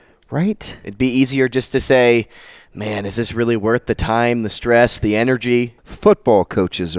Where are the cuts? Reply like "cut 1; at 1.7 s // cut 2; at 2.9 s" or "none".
cut 1; at 5.8 s